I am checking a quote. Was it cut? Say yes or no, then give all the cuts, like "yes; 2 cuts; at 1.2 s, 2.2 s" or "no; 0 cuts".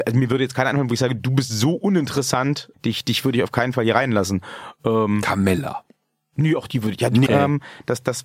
yes; 2 cuts; at 2.7 s, 7.3 s